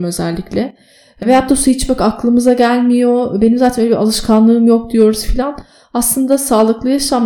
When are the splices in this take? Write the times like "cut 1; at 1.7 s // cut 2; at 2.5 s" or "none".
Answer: none